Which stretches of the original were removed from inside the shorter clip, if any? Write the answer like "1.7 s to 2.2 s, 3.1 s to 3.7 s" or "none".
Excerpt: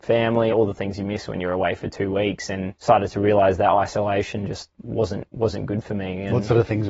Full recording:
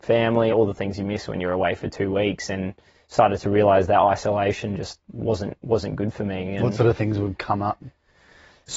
2.8 s to 3.1 s